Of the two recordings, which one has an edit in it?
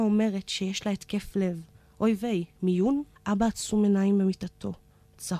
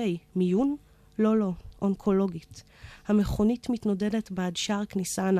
first; 1 cut; at 3.2 s

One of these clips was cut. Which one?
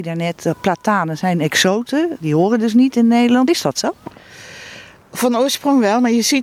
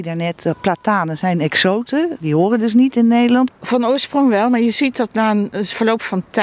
second; 1 cut; at 3.5 s

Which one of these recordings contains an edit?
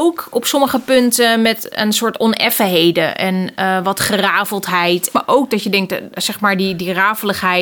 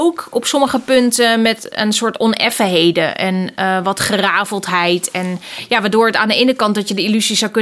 first; 1 cut; at 5.1 s

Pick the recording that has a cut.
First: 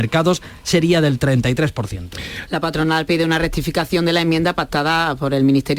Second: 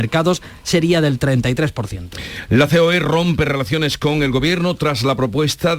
first; 1 cut; at 2.5 s

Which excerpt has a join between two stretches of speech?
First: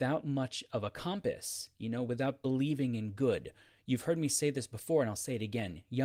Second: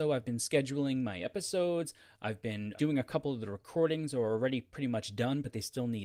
second; 1 cut; at 2.8 s

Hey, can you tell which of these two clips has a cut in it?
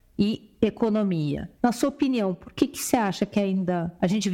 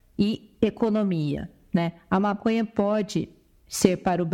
first; 1 cut; at 1.6 s

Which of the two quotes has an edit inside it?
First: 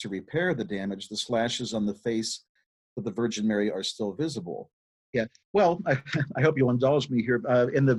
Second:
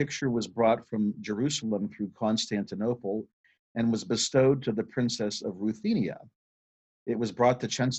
first; 1 cut; at 5.0 s

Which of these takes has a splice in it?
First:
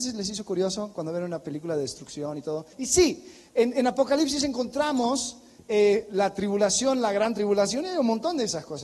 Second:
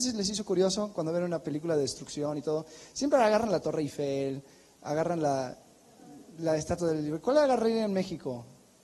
first; 1 cut; at 2.7 s

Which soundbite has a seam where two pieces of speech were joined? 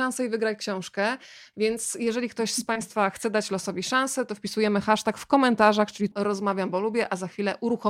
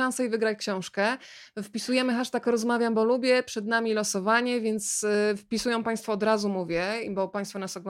first; 2 cuts; at 1.5 s, 6.1 s

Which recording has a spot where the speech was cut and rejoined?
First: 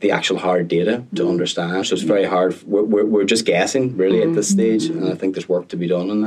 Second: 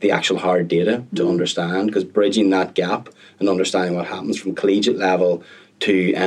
first; 1 cut; at 1.8 s

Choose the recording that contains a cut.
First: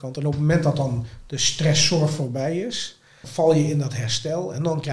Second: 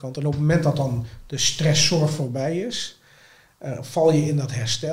first; 1 cut; at 3.2 s

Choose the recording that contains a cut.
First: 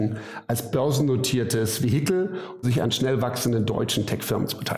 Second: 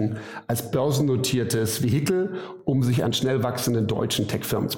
first; 1 cut; at 2.6 s

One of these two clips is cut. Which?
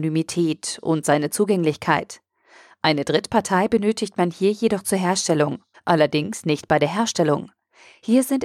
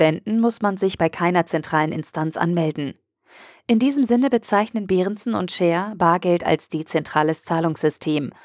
first; 1 cut; at 5.7 s

